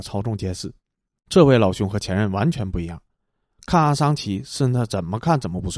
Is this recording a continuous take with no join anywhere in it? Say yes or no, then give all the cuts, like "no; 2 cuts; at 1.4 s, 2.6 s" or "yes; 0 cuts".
no; 1 cut; at 1.2 s